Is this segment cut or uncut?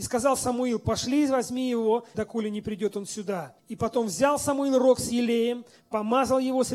cut